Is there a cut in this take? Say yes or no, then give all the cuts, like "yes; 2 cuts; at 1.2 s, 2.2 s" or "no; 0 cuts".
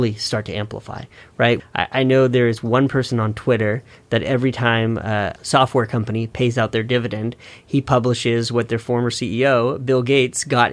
yes; 2 cuts; at 1.6 s, 5.4 s